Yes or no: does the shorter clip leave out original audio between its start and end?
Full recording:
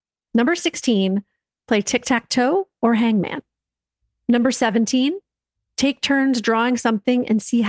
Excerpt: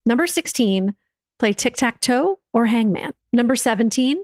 yes